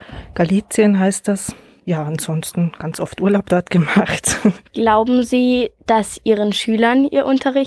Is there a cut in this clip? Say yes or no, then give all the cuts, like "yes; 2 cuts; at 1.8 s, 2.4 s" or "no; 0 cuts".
no; 0 cuts